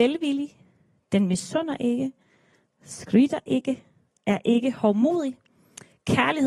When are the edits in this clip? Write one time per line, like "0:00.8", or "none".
none